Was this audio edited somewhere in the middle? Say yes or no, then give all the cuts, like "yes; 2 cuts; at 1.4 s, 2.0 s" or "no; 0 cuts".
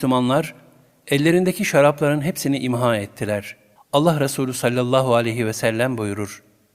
yes; 1 cut; at 3.8 s